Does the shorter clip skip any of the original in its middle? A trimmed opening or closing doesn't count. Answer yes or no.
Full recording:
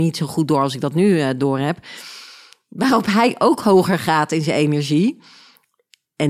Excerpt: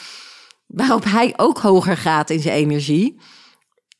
no